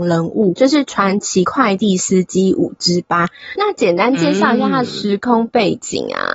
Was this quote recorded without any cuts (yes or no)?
no